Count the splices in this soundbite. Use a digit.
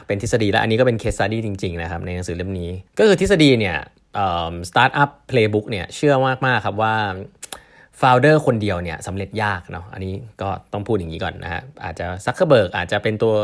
1